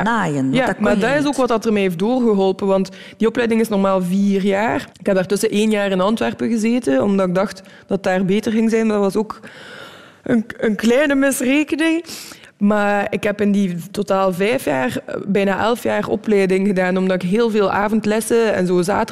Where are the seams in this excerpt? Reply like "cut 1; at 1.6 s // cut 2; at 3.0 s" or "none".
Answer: cut 1; at 4.9 s